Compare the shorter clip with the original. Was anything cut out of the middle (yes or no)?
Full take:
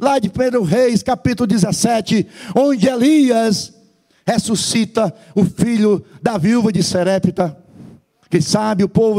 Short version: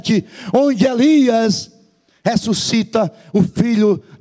no